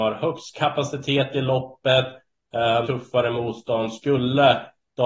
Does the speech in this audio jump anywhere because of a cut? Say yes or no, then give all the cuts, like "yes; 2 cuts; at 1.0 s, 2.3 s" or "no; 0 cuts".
yes; 1 cut; at 2.8 s